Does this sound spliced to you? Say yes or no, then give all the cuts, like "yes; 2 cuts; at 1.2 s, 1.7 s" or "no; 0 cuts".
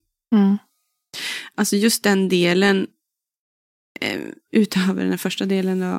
no; 0 cuts